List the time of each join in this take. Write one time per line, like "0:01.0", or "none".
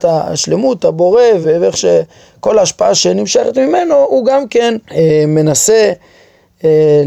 0:01.4
0:04.8